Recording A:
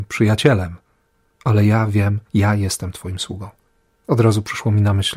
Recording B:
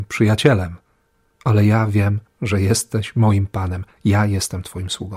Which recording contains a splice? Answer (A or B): A